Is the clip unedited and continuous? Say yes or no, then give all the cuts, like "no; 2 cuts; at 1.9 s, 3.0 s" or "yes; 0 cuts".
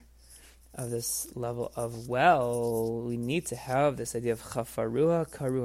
yes; 0 cuts